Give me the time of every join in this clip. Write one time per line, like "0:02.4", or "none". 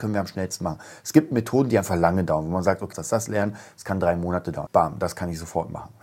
0:02.9
0:04.7